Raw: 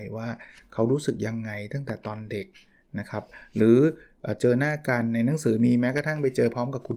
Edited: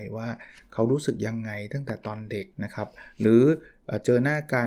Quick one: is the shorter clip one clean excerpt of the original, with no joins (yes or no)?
no